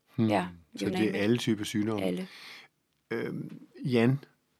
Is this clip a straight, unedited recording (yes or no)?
yes